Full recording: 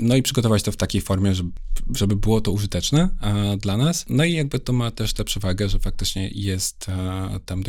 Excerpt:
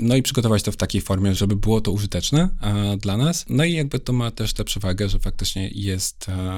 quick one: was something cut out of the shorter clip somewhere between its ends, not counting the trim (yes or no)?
yes